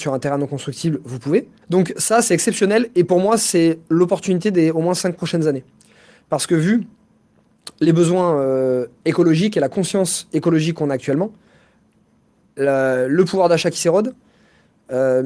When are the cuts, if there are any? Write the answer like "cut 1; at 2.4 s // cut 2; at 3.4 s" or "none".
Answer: cut 1; at 1.6 s